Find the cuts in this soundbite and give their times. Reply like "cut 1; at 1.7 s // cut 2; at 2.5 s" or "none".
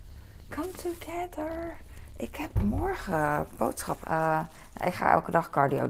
cut 1; at 4.0 s